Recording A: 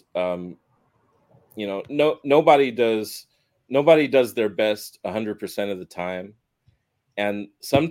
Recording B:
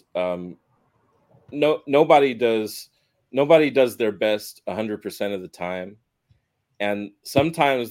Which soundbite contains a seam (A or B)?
B